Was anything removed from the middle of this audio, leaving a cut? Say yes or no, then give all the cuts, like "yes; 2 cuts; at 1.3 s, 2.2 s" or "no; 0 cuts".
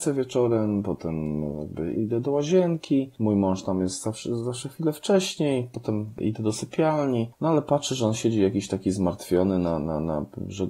yes; 1 cut; at 1.9 s